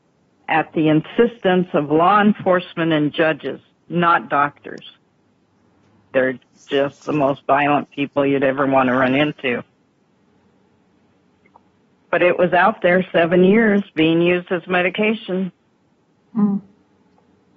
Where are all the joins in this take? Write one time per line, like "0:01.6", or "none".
0:06.1